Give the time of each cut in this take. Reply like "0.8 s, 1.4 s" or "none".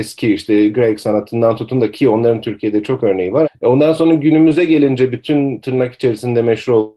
3.4 s